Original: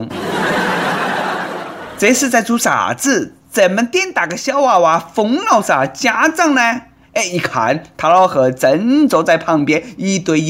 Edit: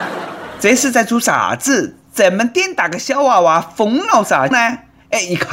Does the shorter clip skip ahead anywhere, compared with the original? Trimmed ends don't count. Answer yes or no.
yes